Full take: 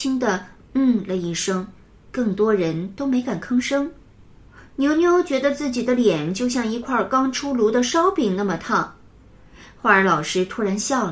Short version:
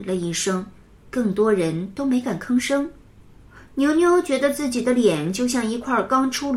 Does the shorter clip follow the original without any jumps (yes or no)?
yes